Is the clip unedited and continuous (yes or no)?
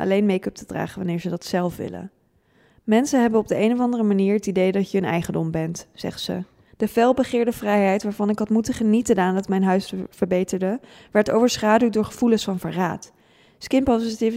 no